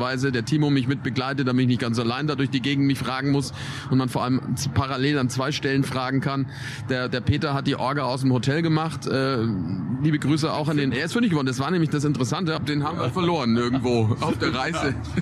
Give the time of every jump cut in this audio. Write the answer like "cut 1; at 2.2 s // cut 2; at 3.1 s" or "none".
cut 1; at 10.9 s // cut 2; at 12.6 s